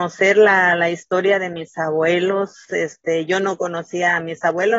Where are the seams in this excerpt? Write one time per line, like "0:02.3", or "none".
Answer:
0:02.7

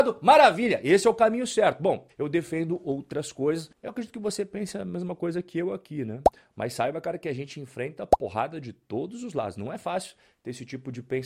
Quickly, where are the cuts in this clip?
0:02.1

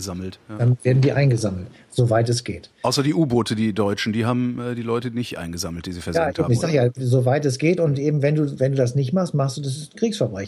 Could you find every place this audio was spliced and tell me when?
none

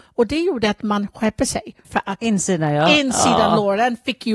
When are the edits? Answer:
0:01.8

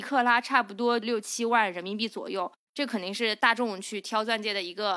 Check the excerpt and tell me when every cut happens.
0:02.7

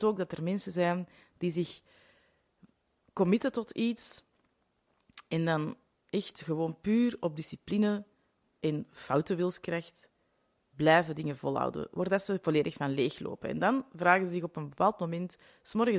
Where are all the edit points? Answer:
none

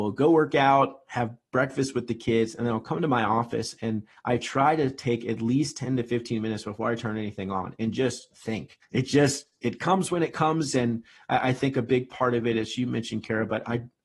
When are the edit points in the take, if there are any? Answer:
0:08.8

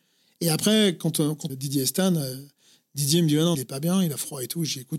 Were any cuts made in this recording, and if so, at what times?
0:01.5
0:03.5

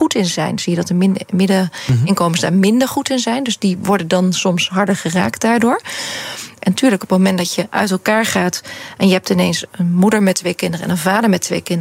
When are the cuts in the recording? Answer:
0:06.6
0:09.7

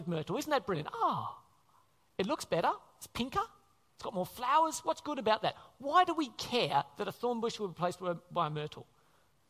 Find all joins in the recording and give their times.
none

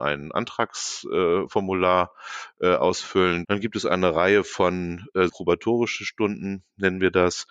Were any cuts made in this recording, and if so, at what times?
0:03.4
0:05.3

